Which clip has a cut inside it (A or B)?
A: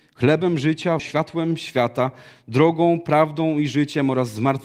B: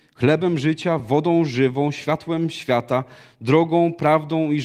A